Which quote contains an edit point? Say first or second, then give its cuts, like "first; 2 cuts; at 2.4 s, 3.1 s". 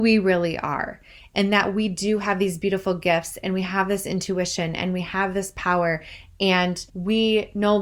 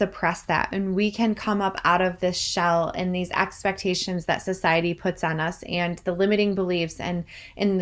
first; 1 cut; at 6.9 s